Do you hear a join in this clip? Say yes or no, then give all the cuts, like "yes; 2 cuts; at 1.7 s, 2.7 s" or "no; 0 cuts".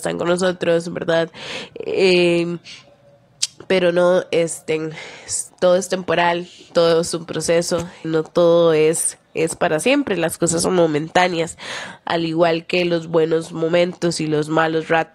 yes; 2 cuts; at 5.5 s, 8.0 s